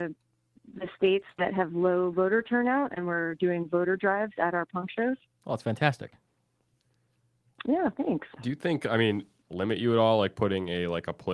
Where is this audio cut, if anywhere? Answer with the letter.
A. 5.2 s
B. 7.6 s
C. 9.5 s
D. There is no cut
C